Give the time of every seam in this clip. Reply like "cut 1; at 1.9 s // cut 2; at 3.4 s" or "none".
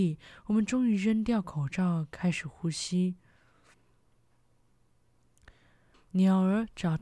cut 1; at 5.9 s